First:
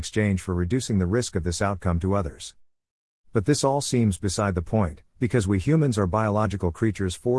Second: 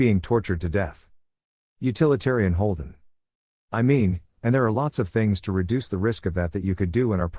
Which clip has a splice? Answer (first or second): second